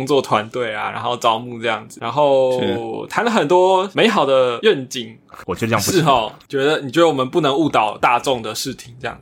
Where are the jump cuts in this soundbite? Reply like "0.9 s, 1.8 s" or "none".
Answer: 5.3 s